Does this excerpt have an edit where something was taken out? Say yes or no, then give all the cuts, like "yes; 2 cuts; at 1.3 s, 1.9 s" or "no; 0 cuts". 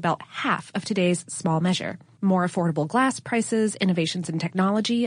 yes; 1 cut; at 2.2 s